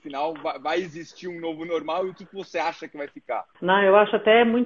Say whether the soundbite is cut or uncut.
cut